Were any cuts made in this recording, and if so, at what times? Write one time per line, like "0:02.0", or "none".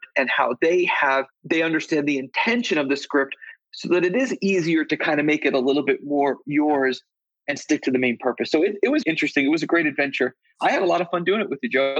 0:09.0

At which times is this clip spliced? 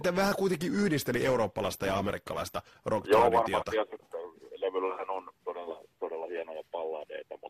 0:04.0

